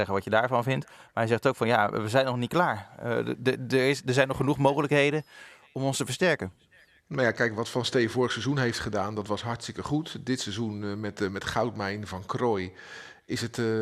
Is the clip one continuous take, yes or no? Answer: yes